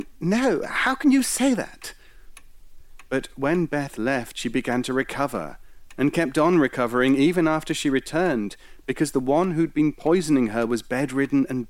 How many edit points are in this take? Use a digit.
0